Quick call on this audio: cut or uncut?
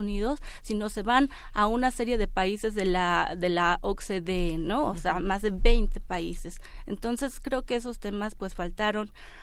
uncut